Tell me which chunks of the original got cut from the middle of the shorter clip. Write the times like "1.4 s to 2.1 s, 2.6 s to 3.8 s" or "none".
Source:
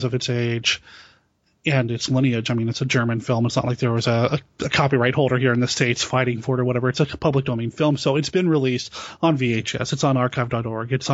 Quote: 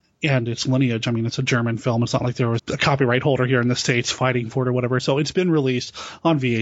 4.0 s to 4.5 s, 6.9 s to 8.0 s